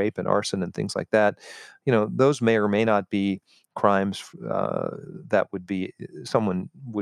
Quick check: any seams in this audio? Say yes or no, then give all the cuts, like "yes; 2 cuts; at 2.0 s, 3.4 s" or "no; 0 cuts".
no; 0 cuts